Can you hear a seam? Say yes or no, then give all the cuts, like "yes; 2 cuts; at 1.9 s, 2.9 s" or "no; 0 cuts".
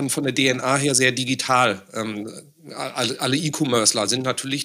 no; 0 cuts